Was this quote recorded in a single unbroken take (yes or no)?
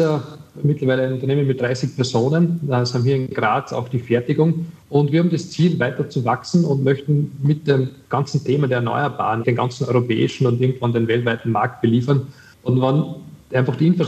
no